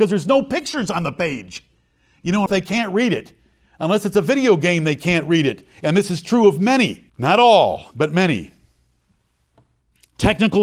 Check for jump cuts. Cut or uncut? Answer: cut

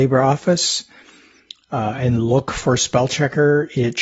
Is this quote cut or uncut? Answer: uncut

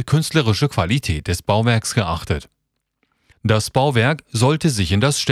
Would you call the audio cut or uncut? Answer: cut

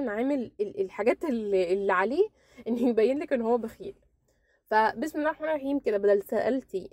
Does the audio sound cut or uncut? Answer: uncut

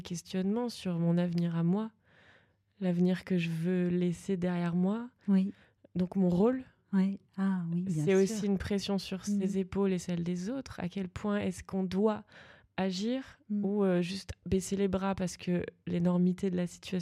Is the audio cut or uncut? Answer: uncut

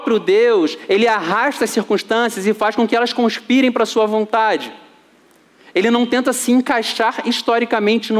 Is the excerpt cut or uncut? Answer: uncut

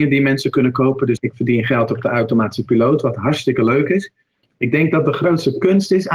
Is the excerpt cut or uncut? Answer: cut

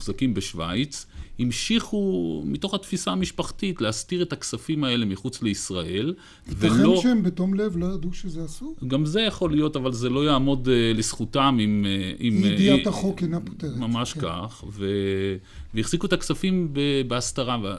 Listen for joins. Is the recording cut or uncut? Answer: uncut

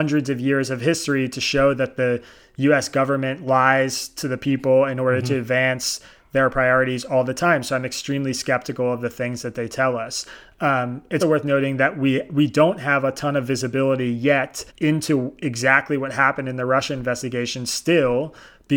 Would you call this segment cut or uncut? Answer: cut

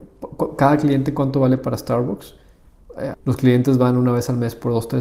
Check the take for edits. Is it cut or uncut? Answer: cut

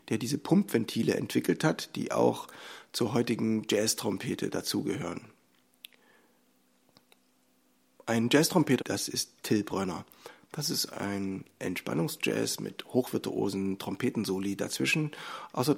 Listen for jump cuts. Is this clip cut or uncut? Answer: cut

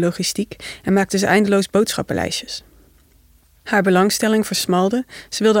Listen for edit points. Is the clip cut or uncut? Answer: uncut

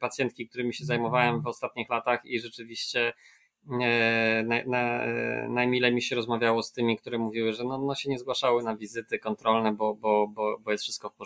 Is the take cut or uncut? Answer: uncut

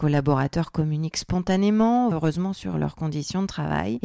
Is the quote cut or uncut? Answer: cut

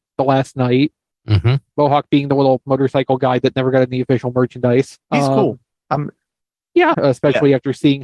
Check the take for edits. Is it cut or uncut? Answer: cut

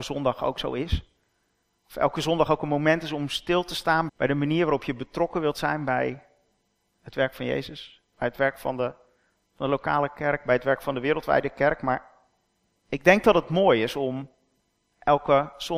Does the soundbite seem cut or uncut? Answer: cut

